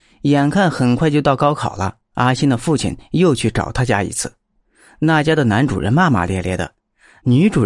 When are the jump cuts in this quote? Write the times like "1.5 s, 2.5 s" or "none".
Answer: none